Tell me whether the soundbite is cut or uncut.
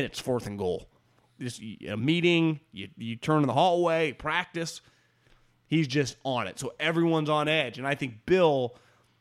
uncut